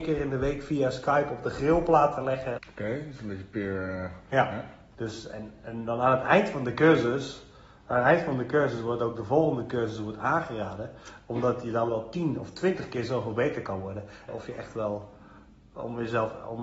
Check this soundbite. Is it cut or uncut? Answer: cut